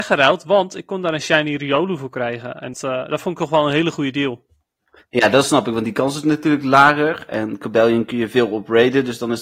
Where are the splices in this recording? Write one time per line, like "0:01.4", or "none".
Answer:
0:02.7